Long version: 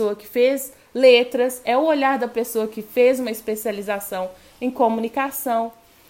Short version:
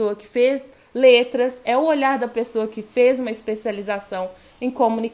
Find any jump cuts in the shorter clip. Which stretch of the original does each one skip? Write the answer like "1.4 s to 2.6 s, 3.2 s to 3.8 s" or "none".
none